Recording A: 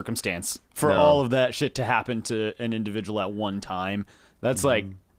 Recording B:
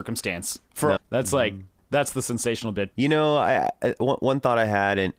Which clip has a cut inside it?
B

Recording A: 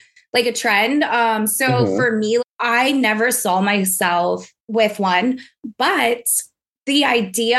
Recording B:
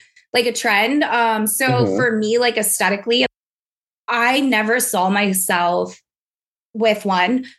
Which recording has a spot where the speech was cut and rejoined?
A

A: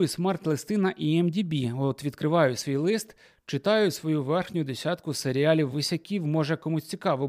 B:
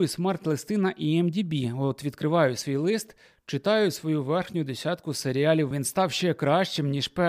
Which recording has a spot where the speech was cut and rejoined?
B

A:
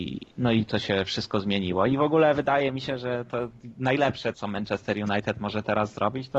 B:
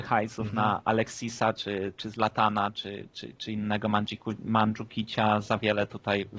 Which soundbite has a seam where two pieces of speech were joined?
A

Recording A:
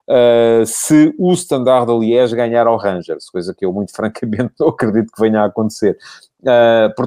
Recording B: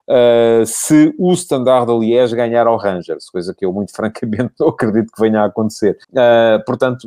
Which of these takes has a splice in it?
B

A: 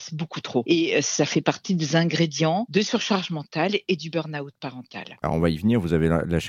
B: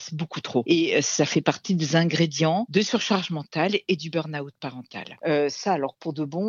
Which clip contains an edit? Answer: B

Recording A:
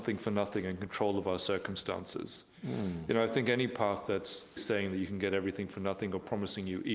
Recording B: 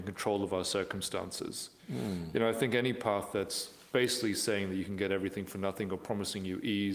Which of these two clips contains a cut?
A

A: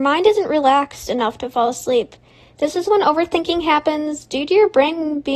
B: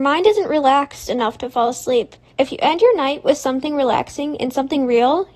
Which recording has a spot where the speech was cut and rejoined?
B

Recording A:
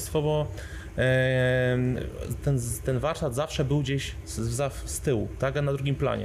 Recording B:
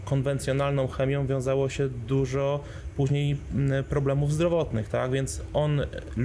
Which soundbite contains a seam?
A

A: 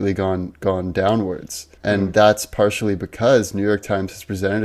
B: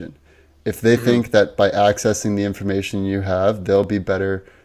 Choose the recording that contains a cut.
A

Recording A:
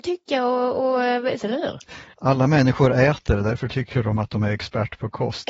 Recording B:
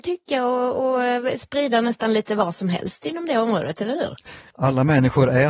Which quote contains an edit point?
A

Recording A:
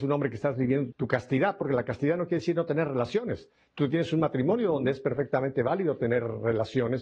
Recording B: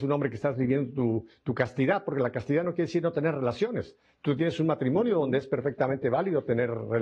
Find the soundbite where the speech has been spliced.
A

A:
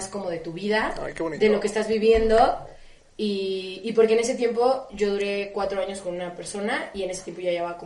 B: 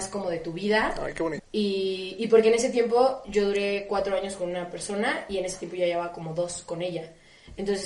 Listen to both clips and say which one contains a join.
B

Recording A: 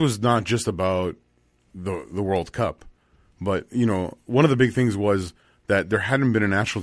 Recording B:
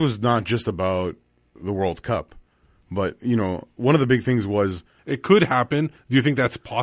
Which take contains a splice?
B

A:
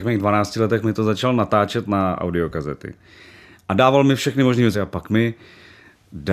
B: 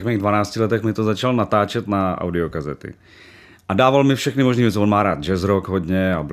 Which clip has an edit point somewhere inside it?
A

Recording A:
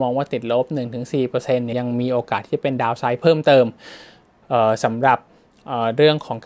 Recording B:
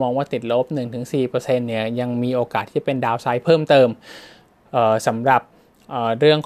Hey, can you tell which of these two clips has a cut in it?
A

